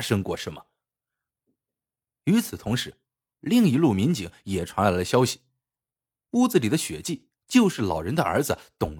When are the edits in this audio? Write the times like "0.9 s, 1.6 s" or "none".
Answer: 2.1 s